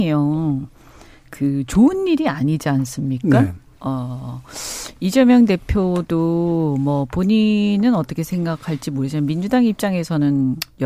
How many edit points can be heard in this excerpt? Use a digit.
0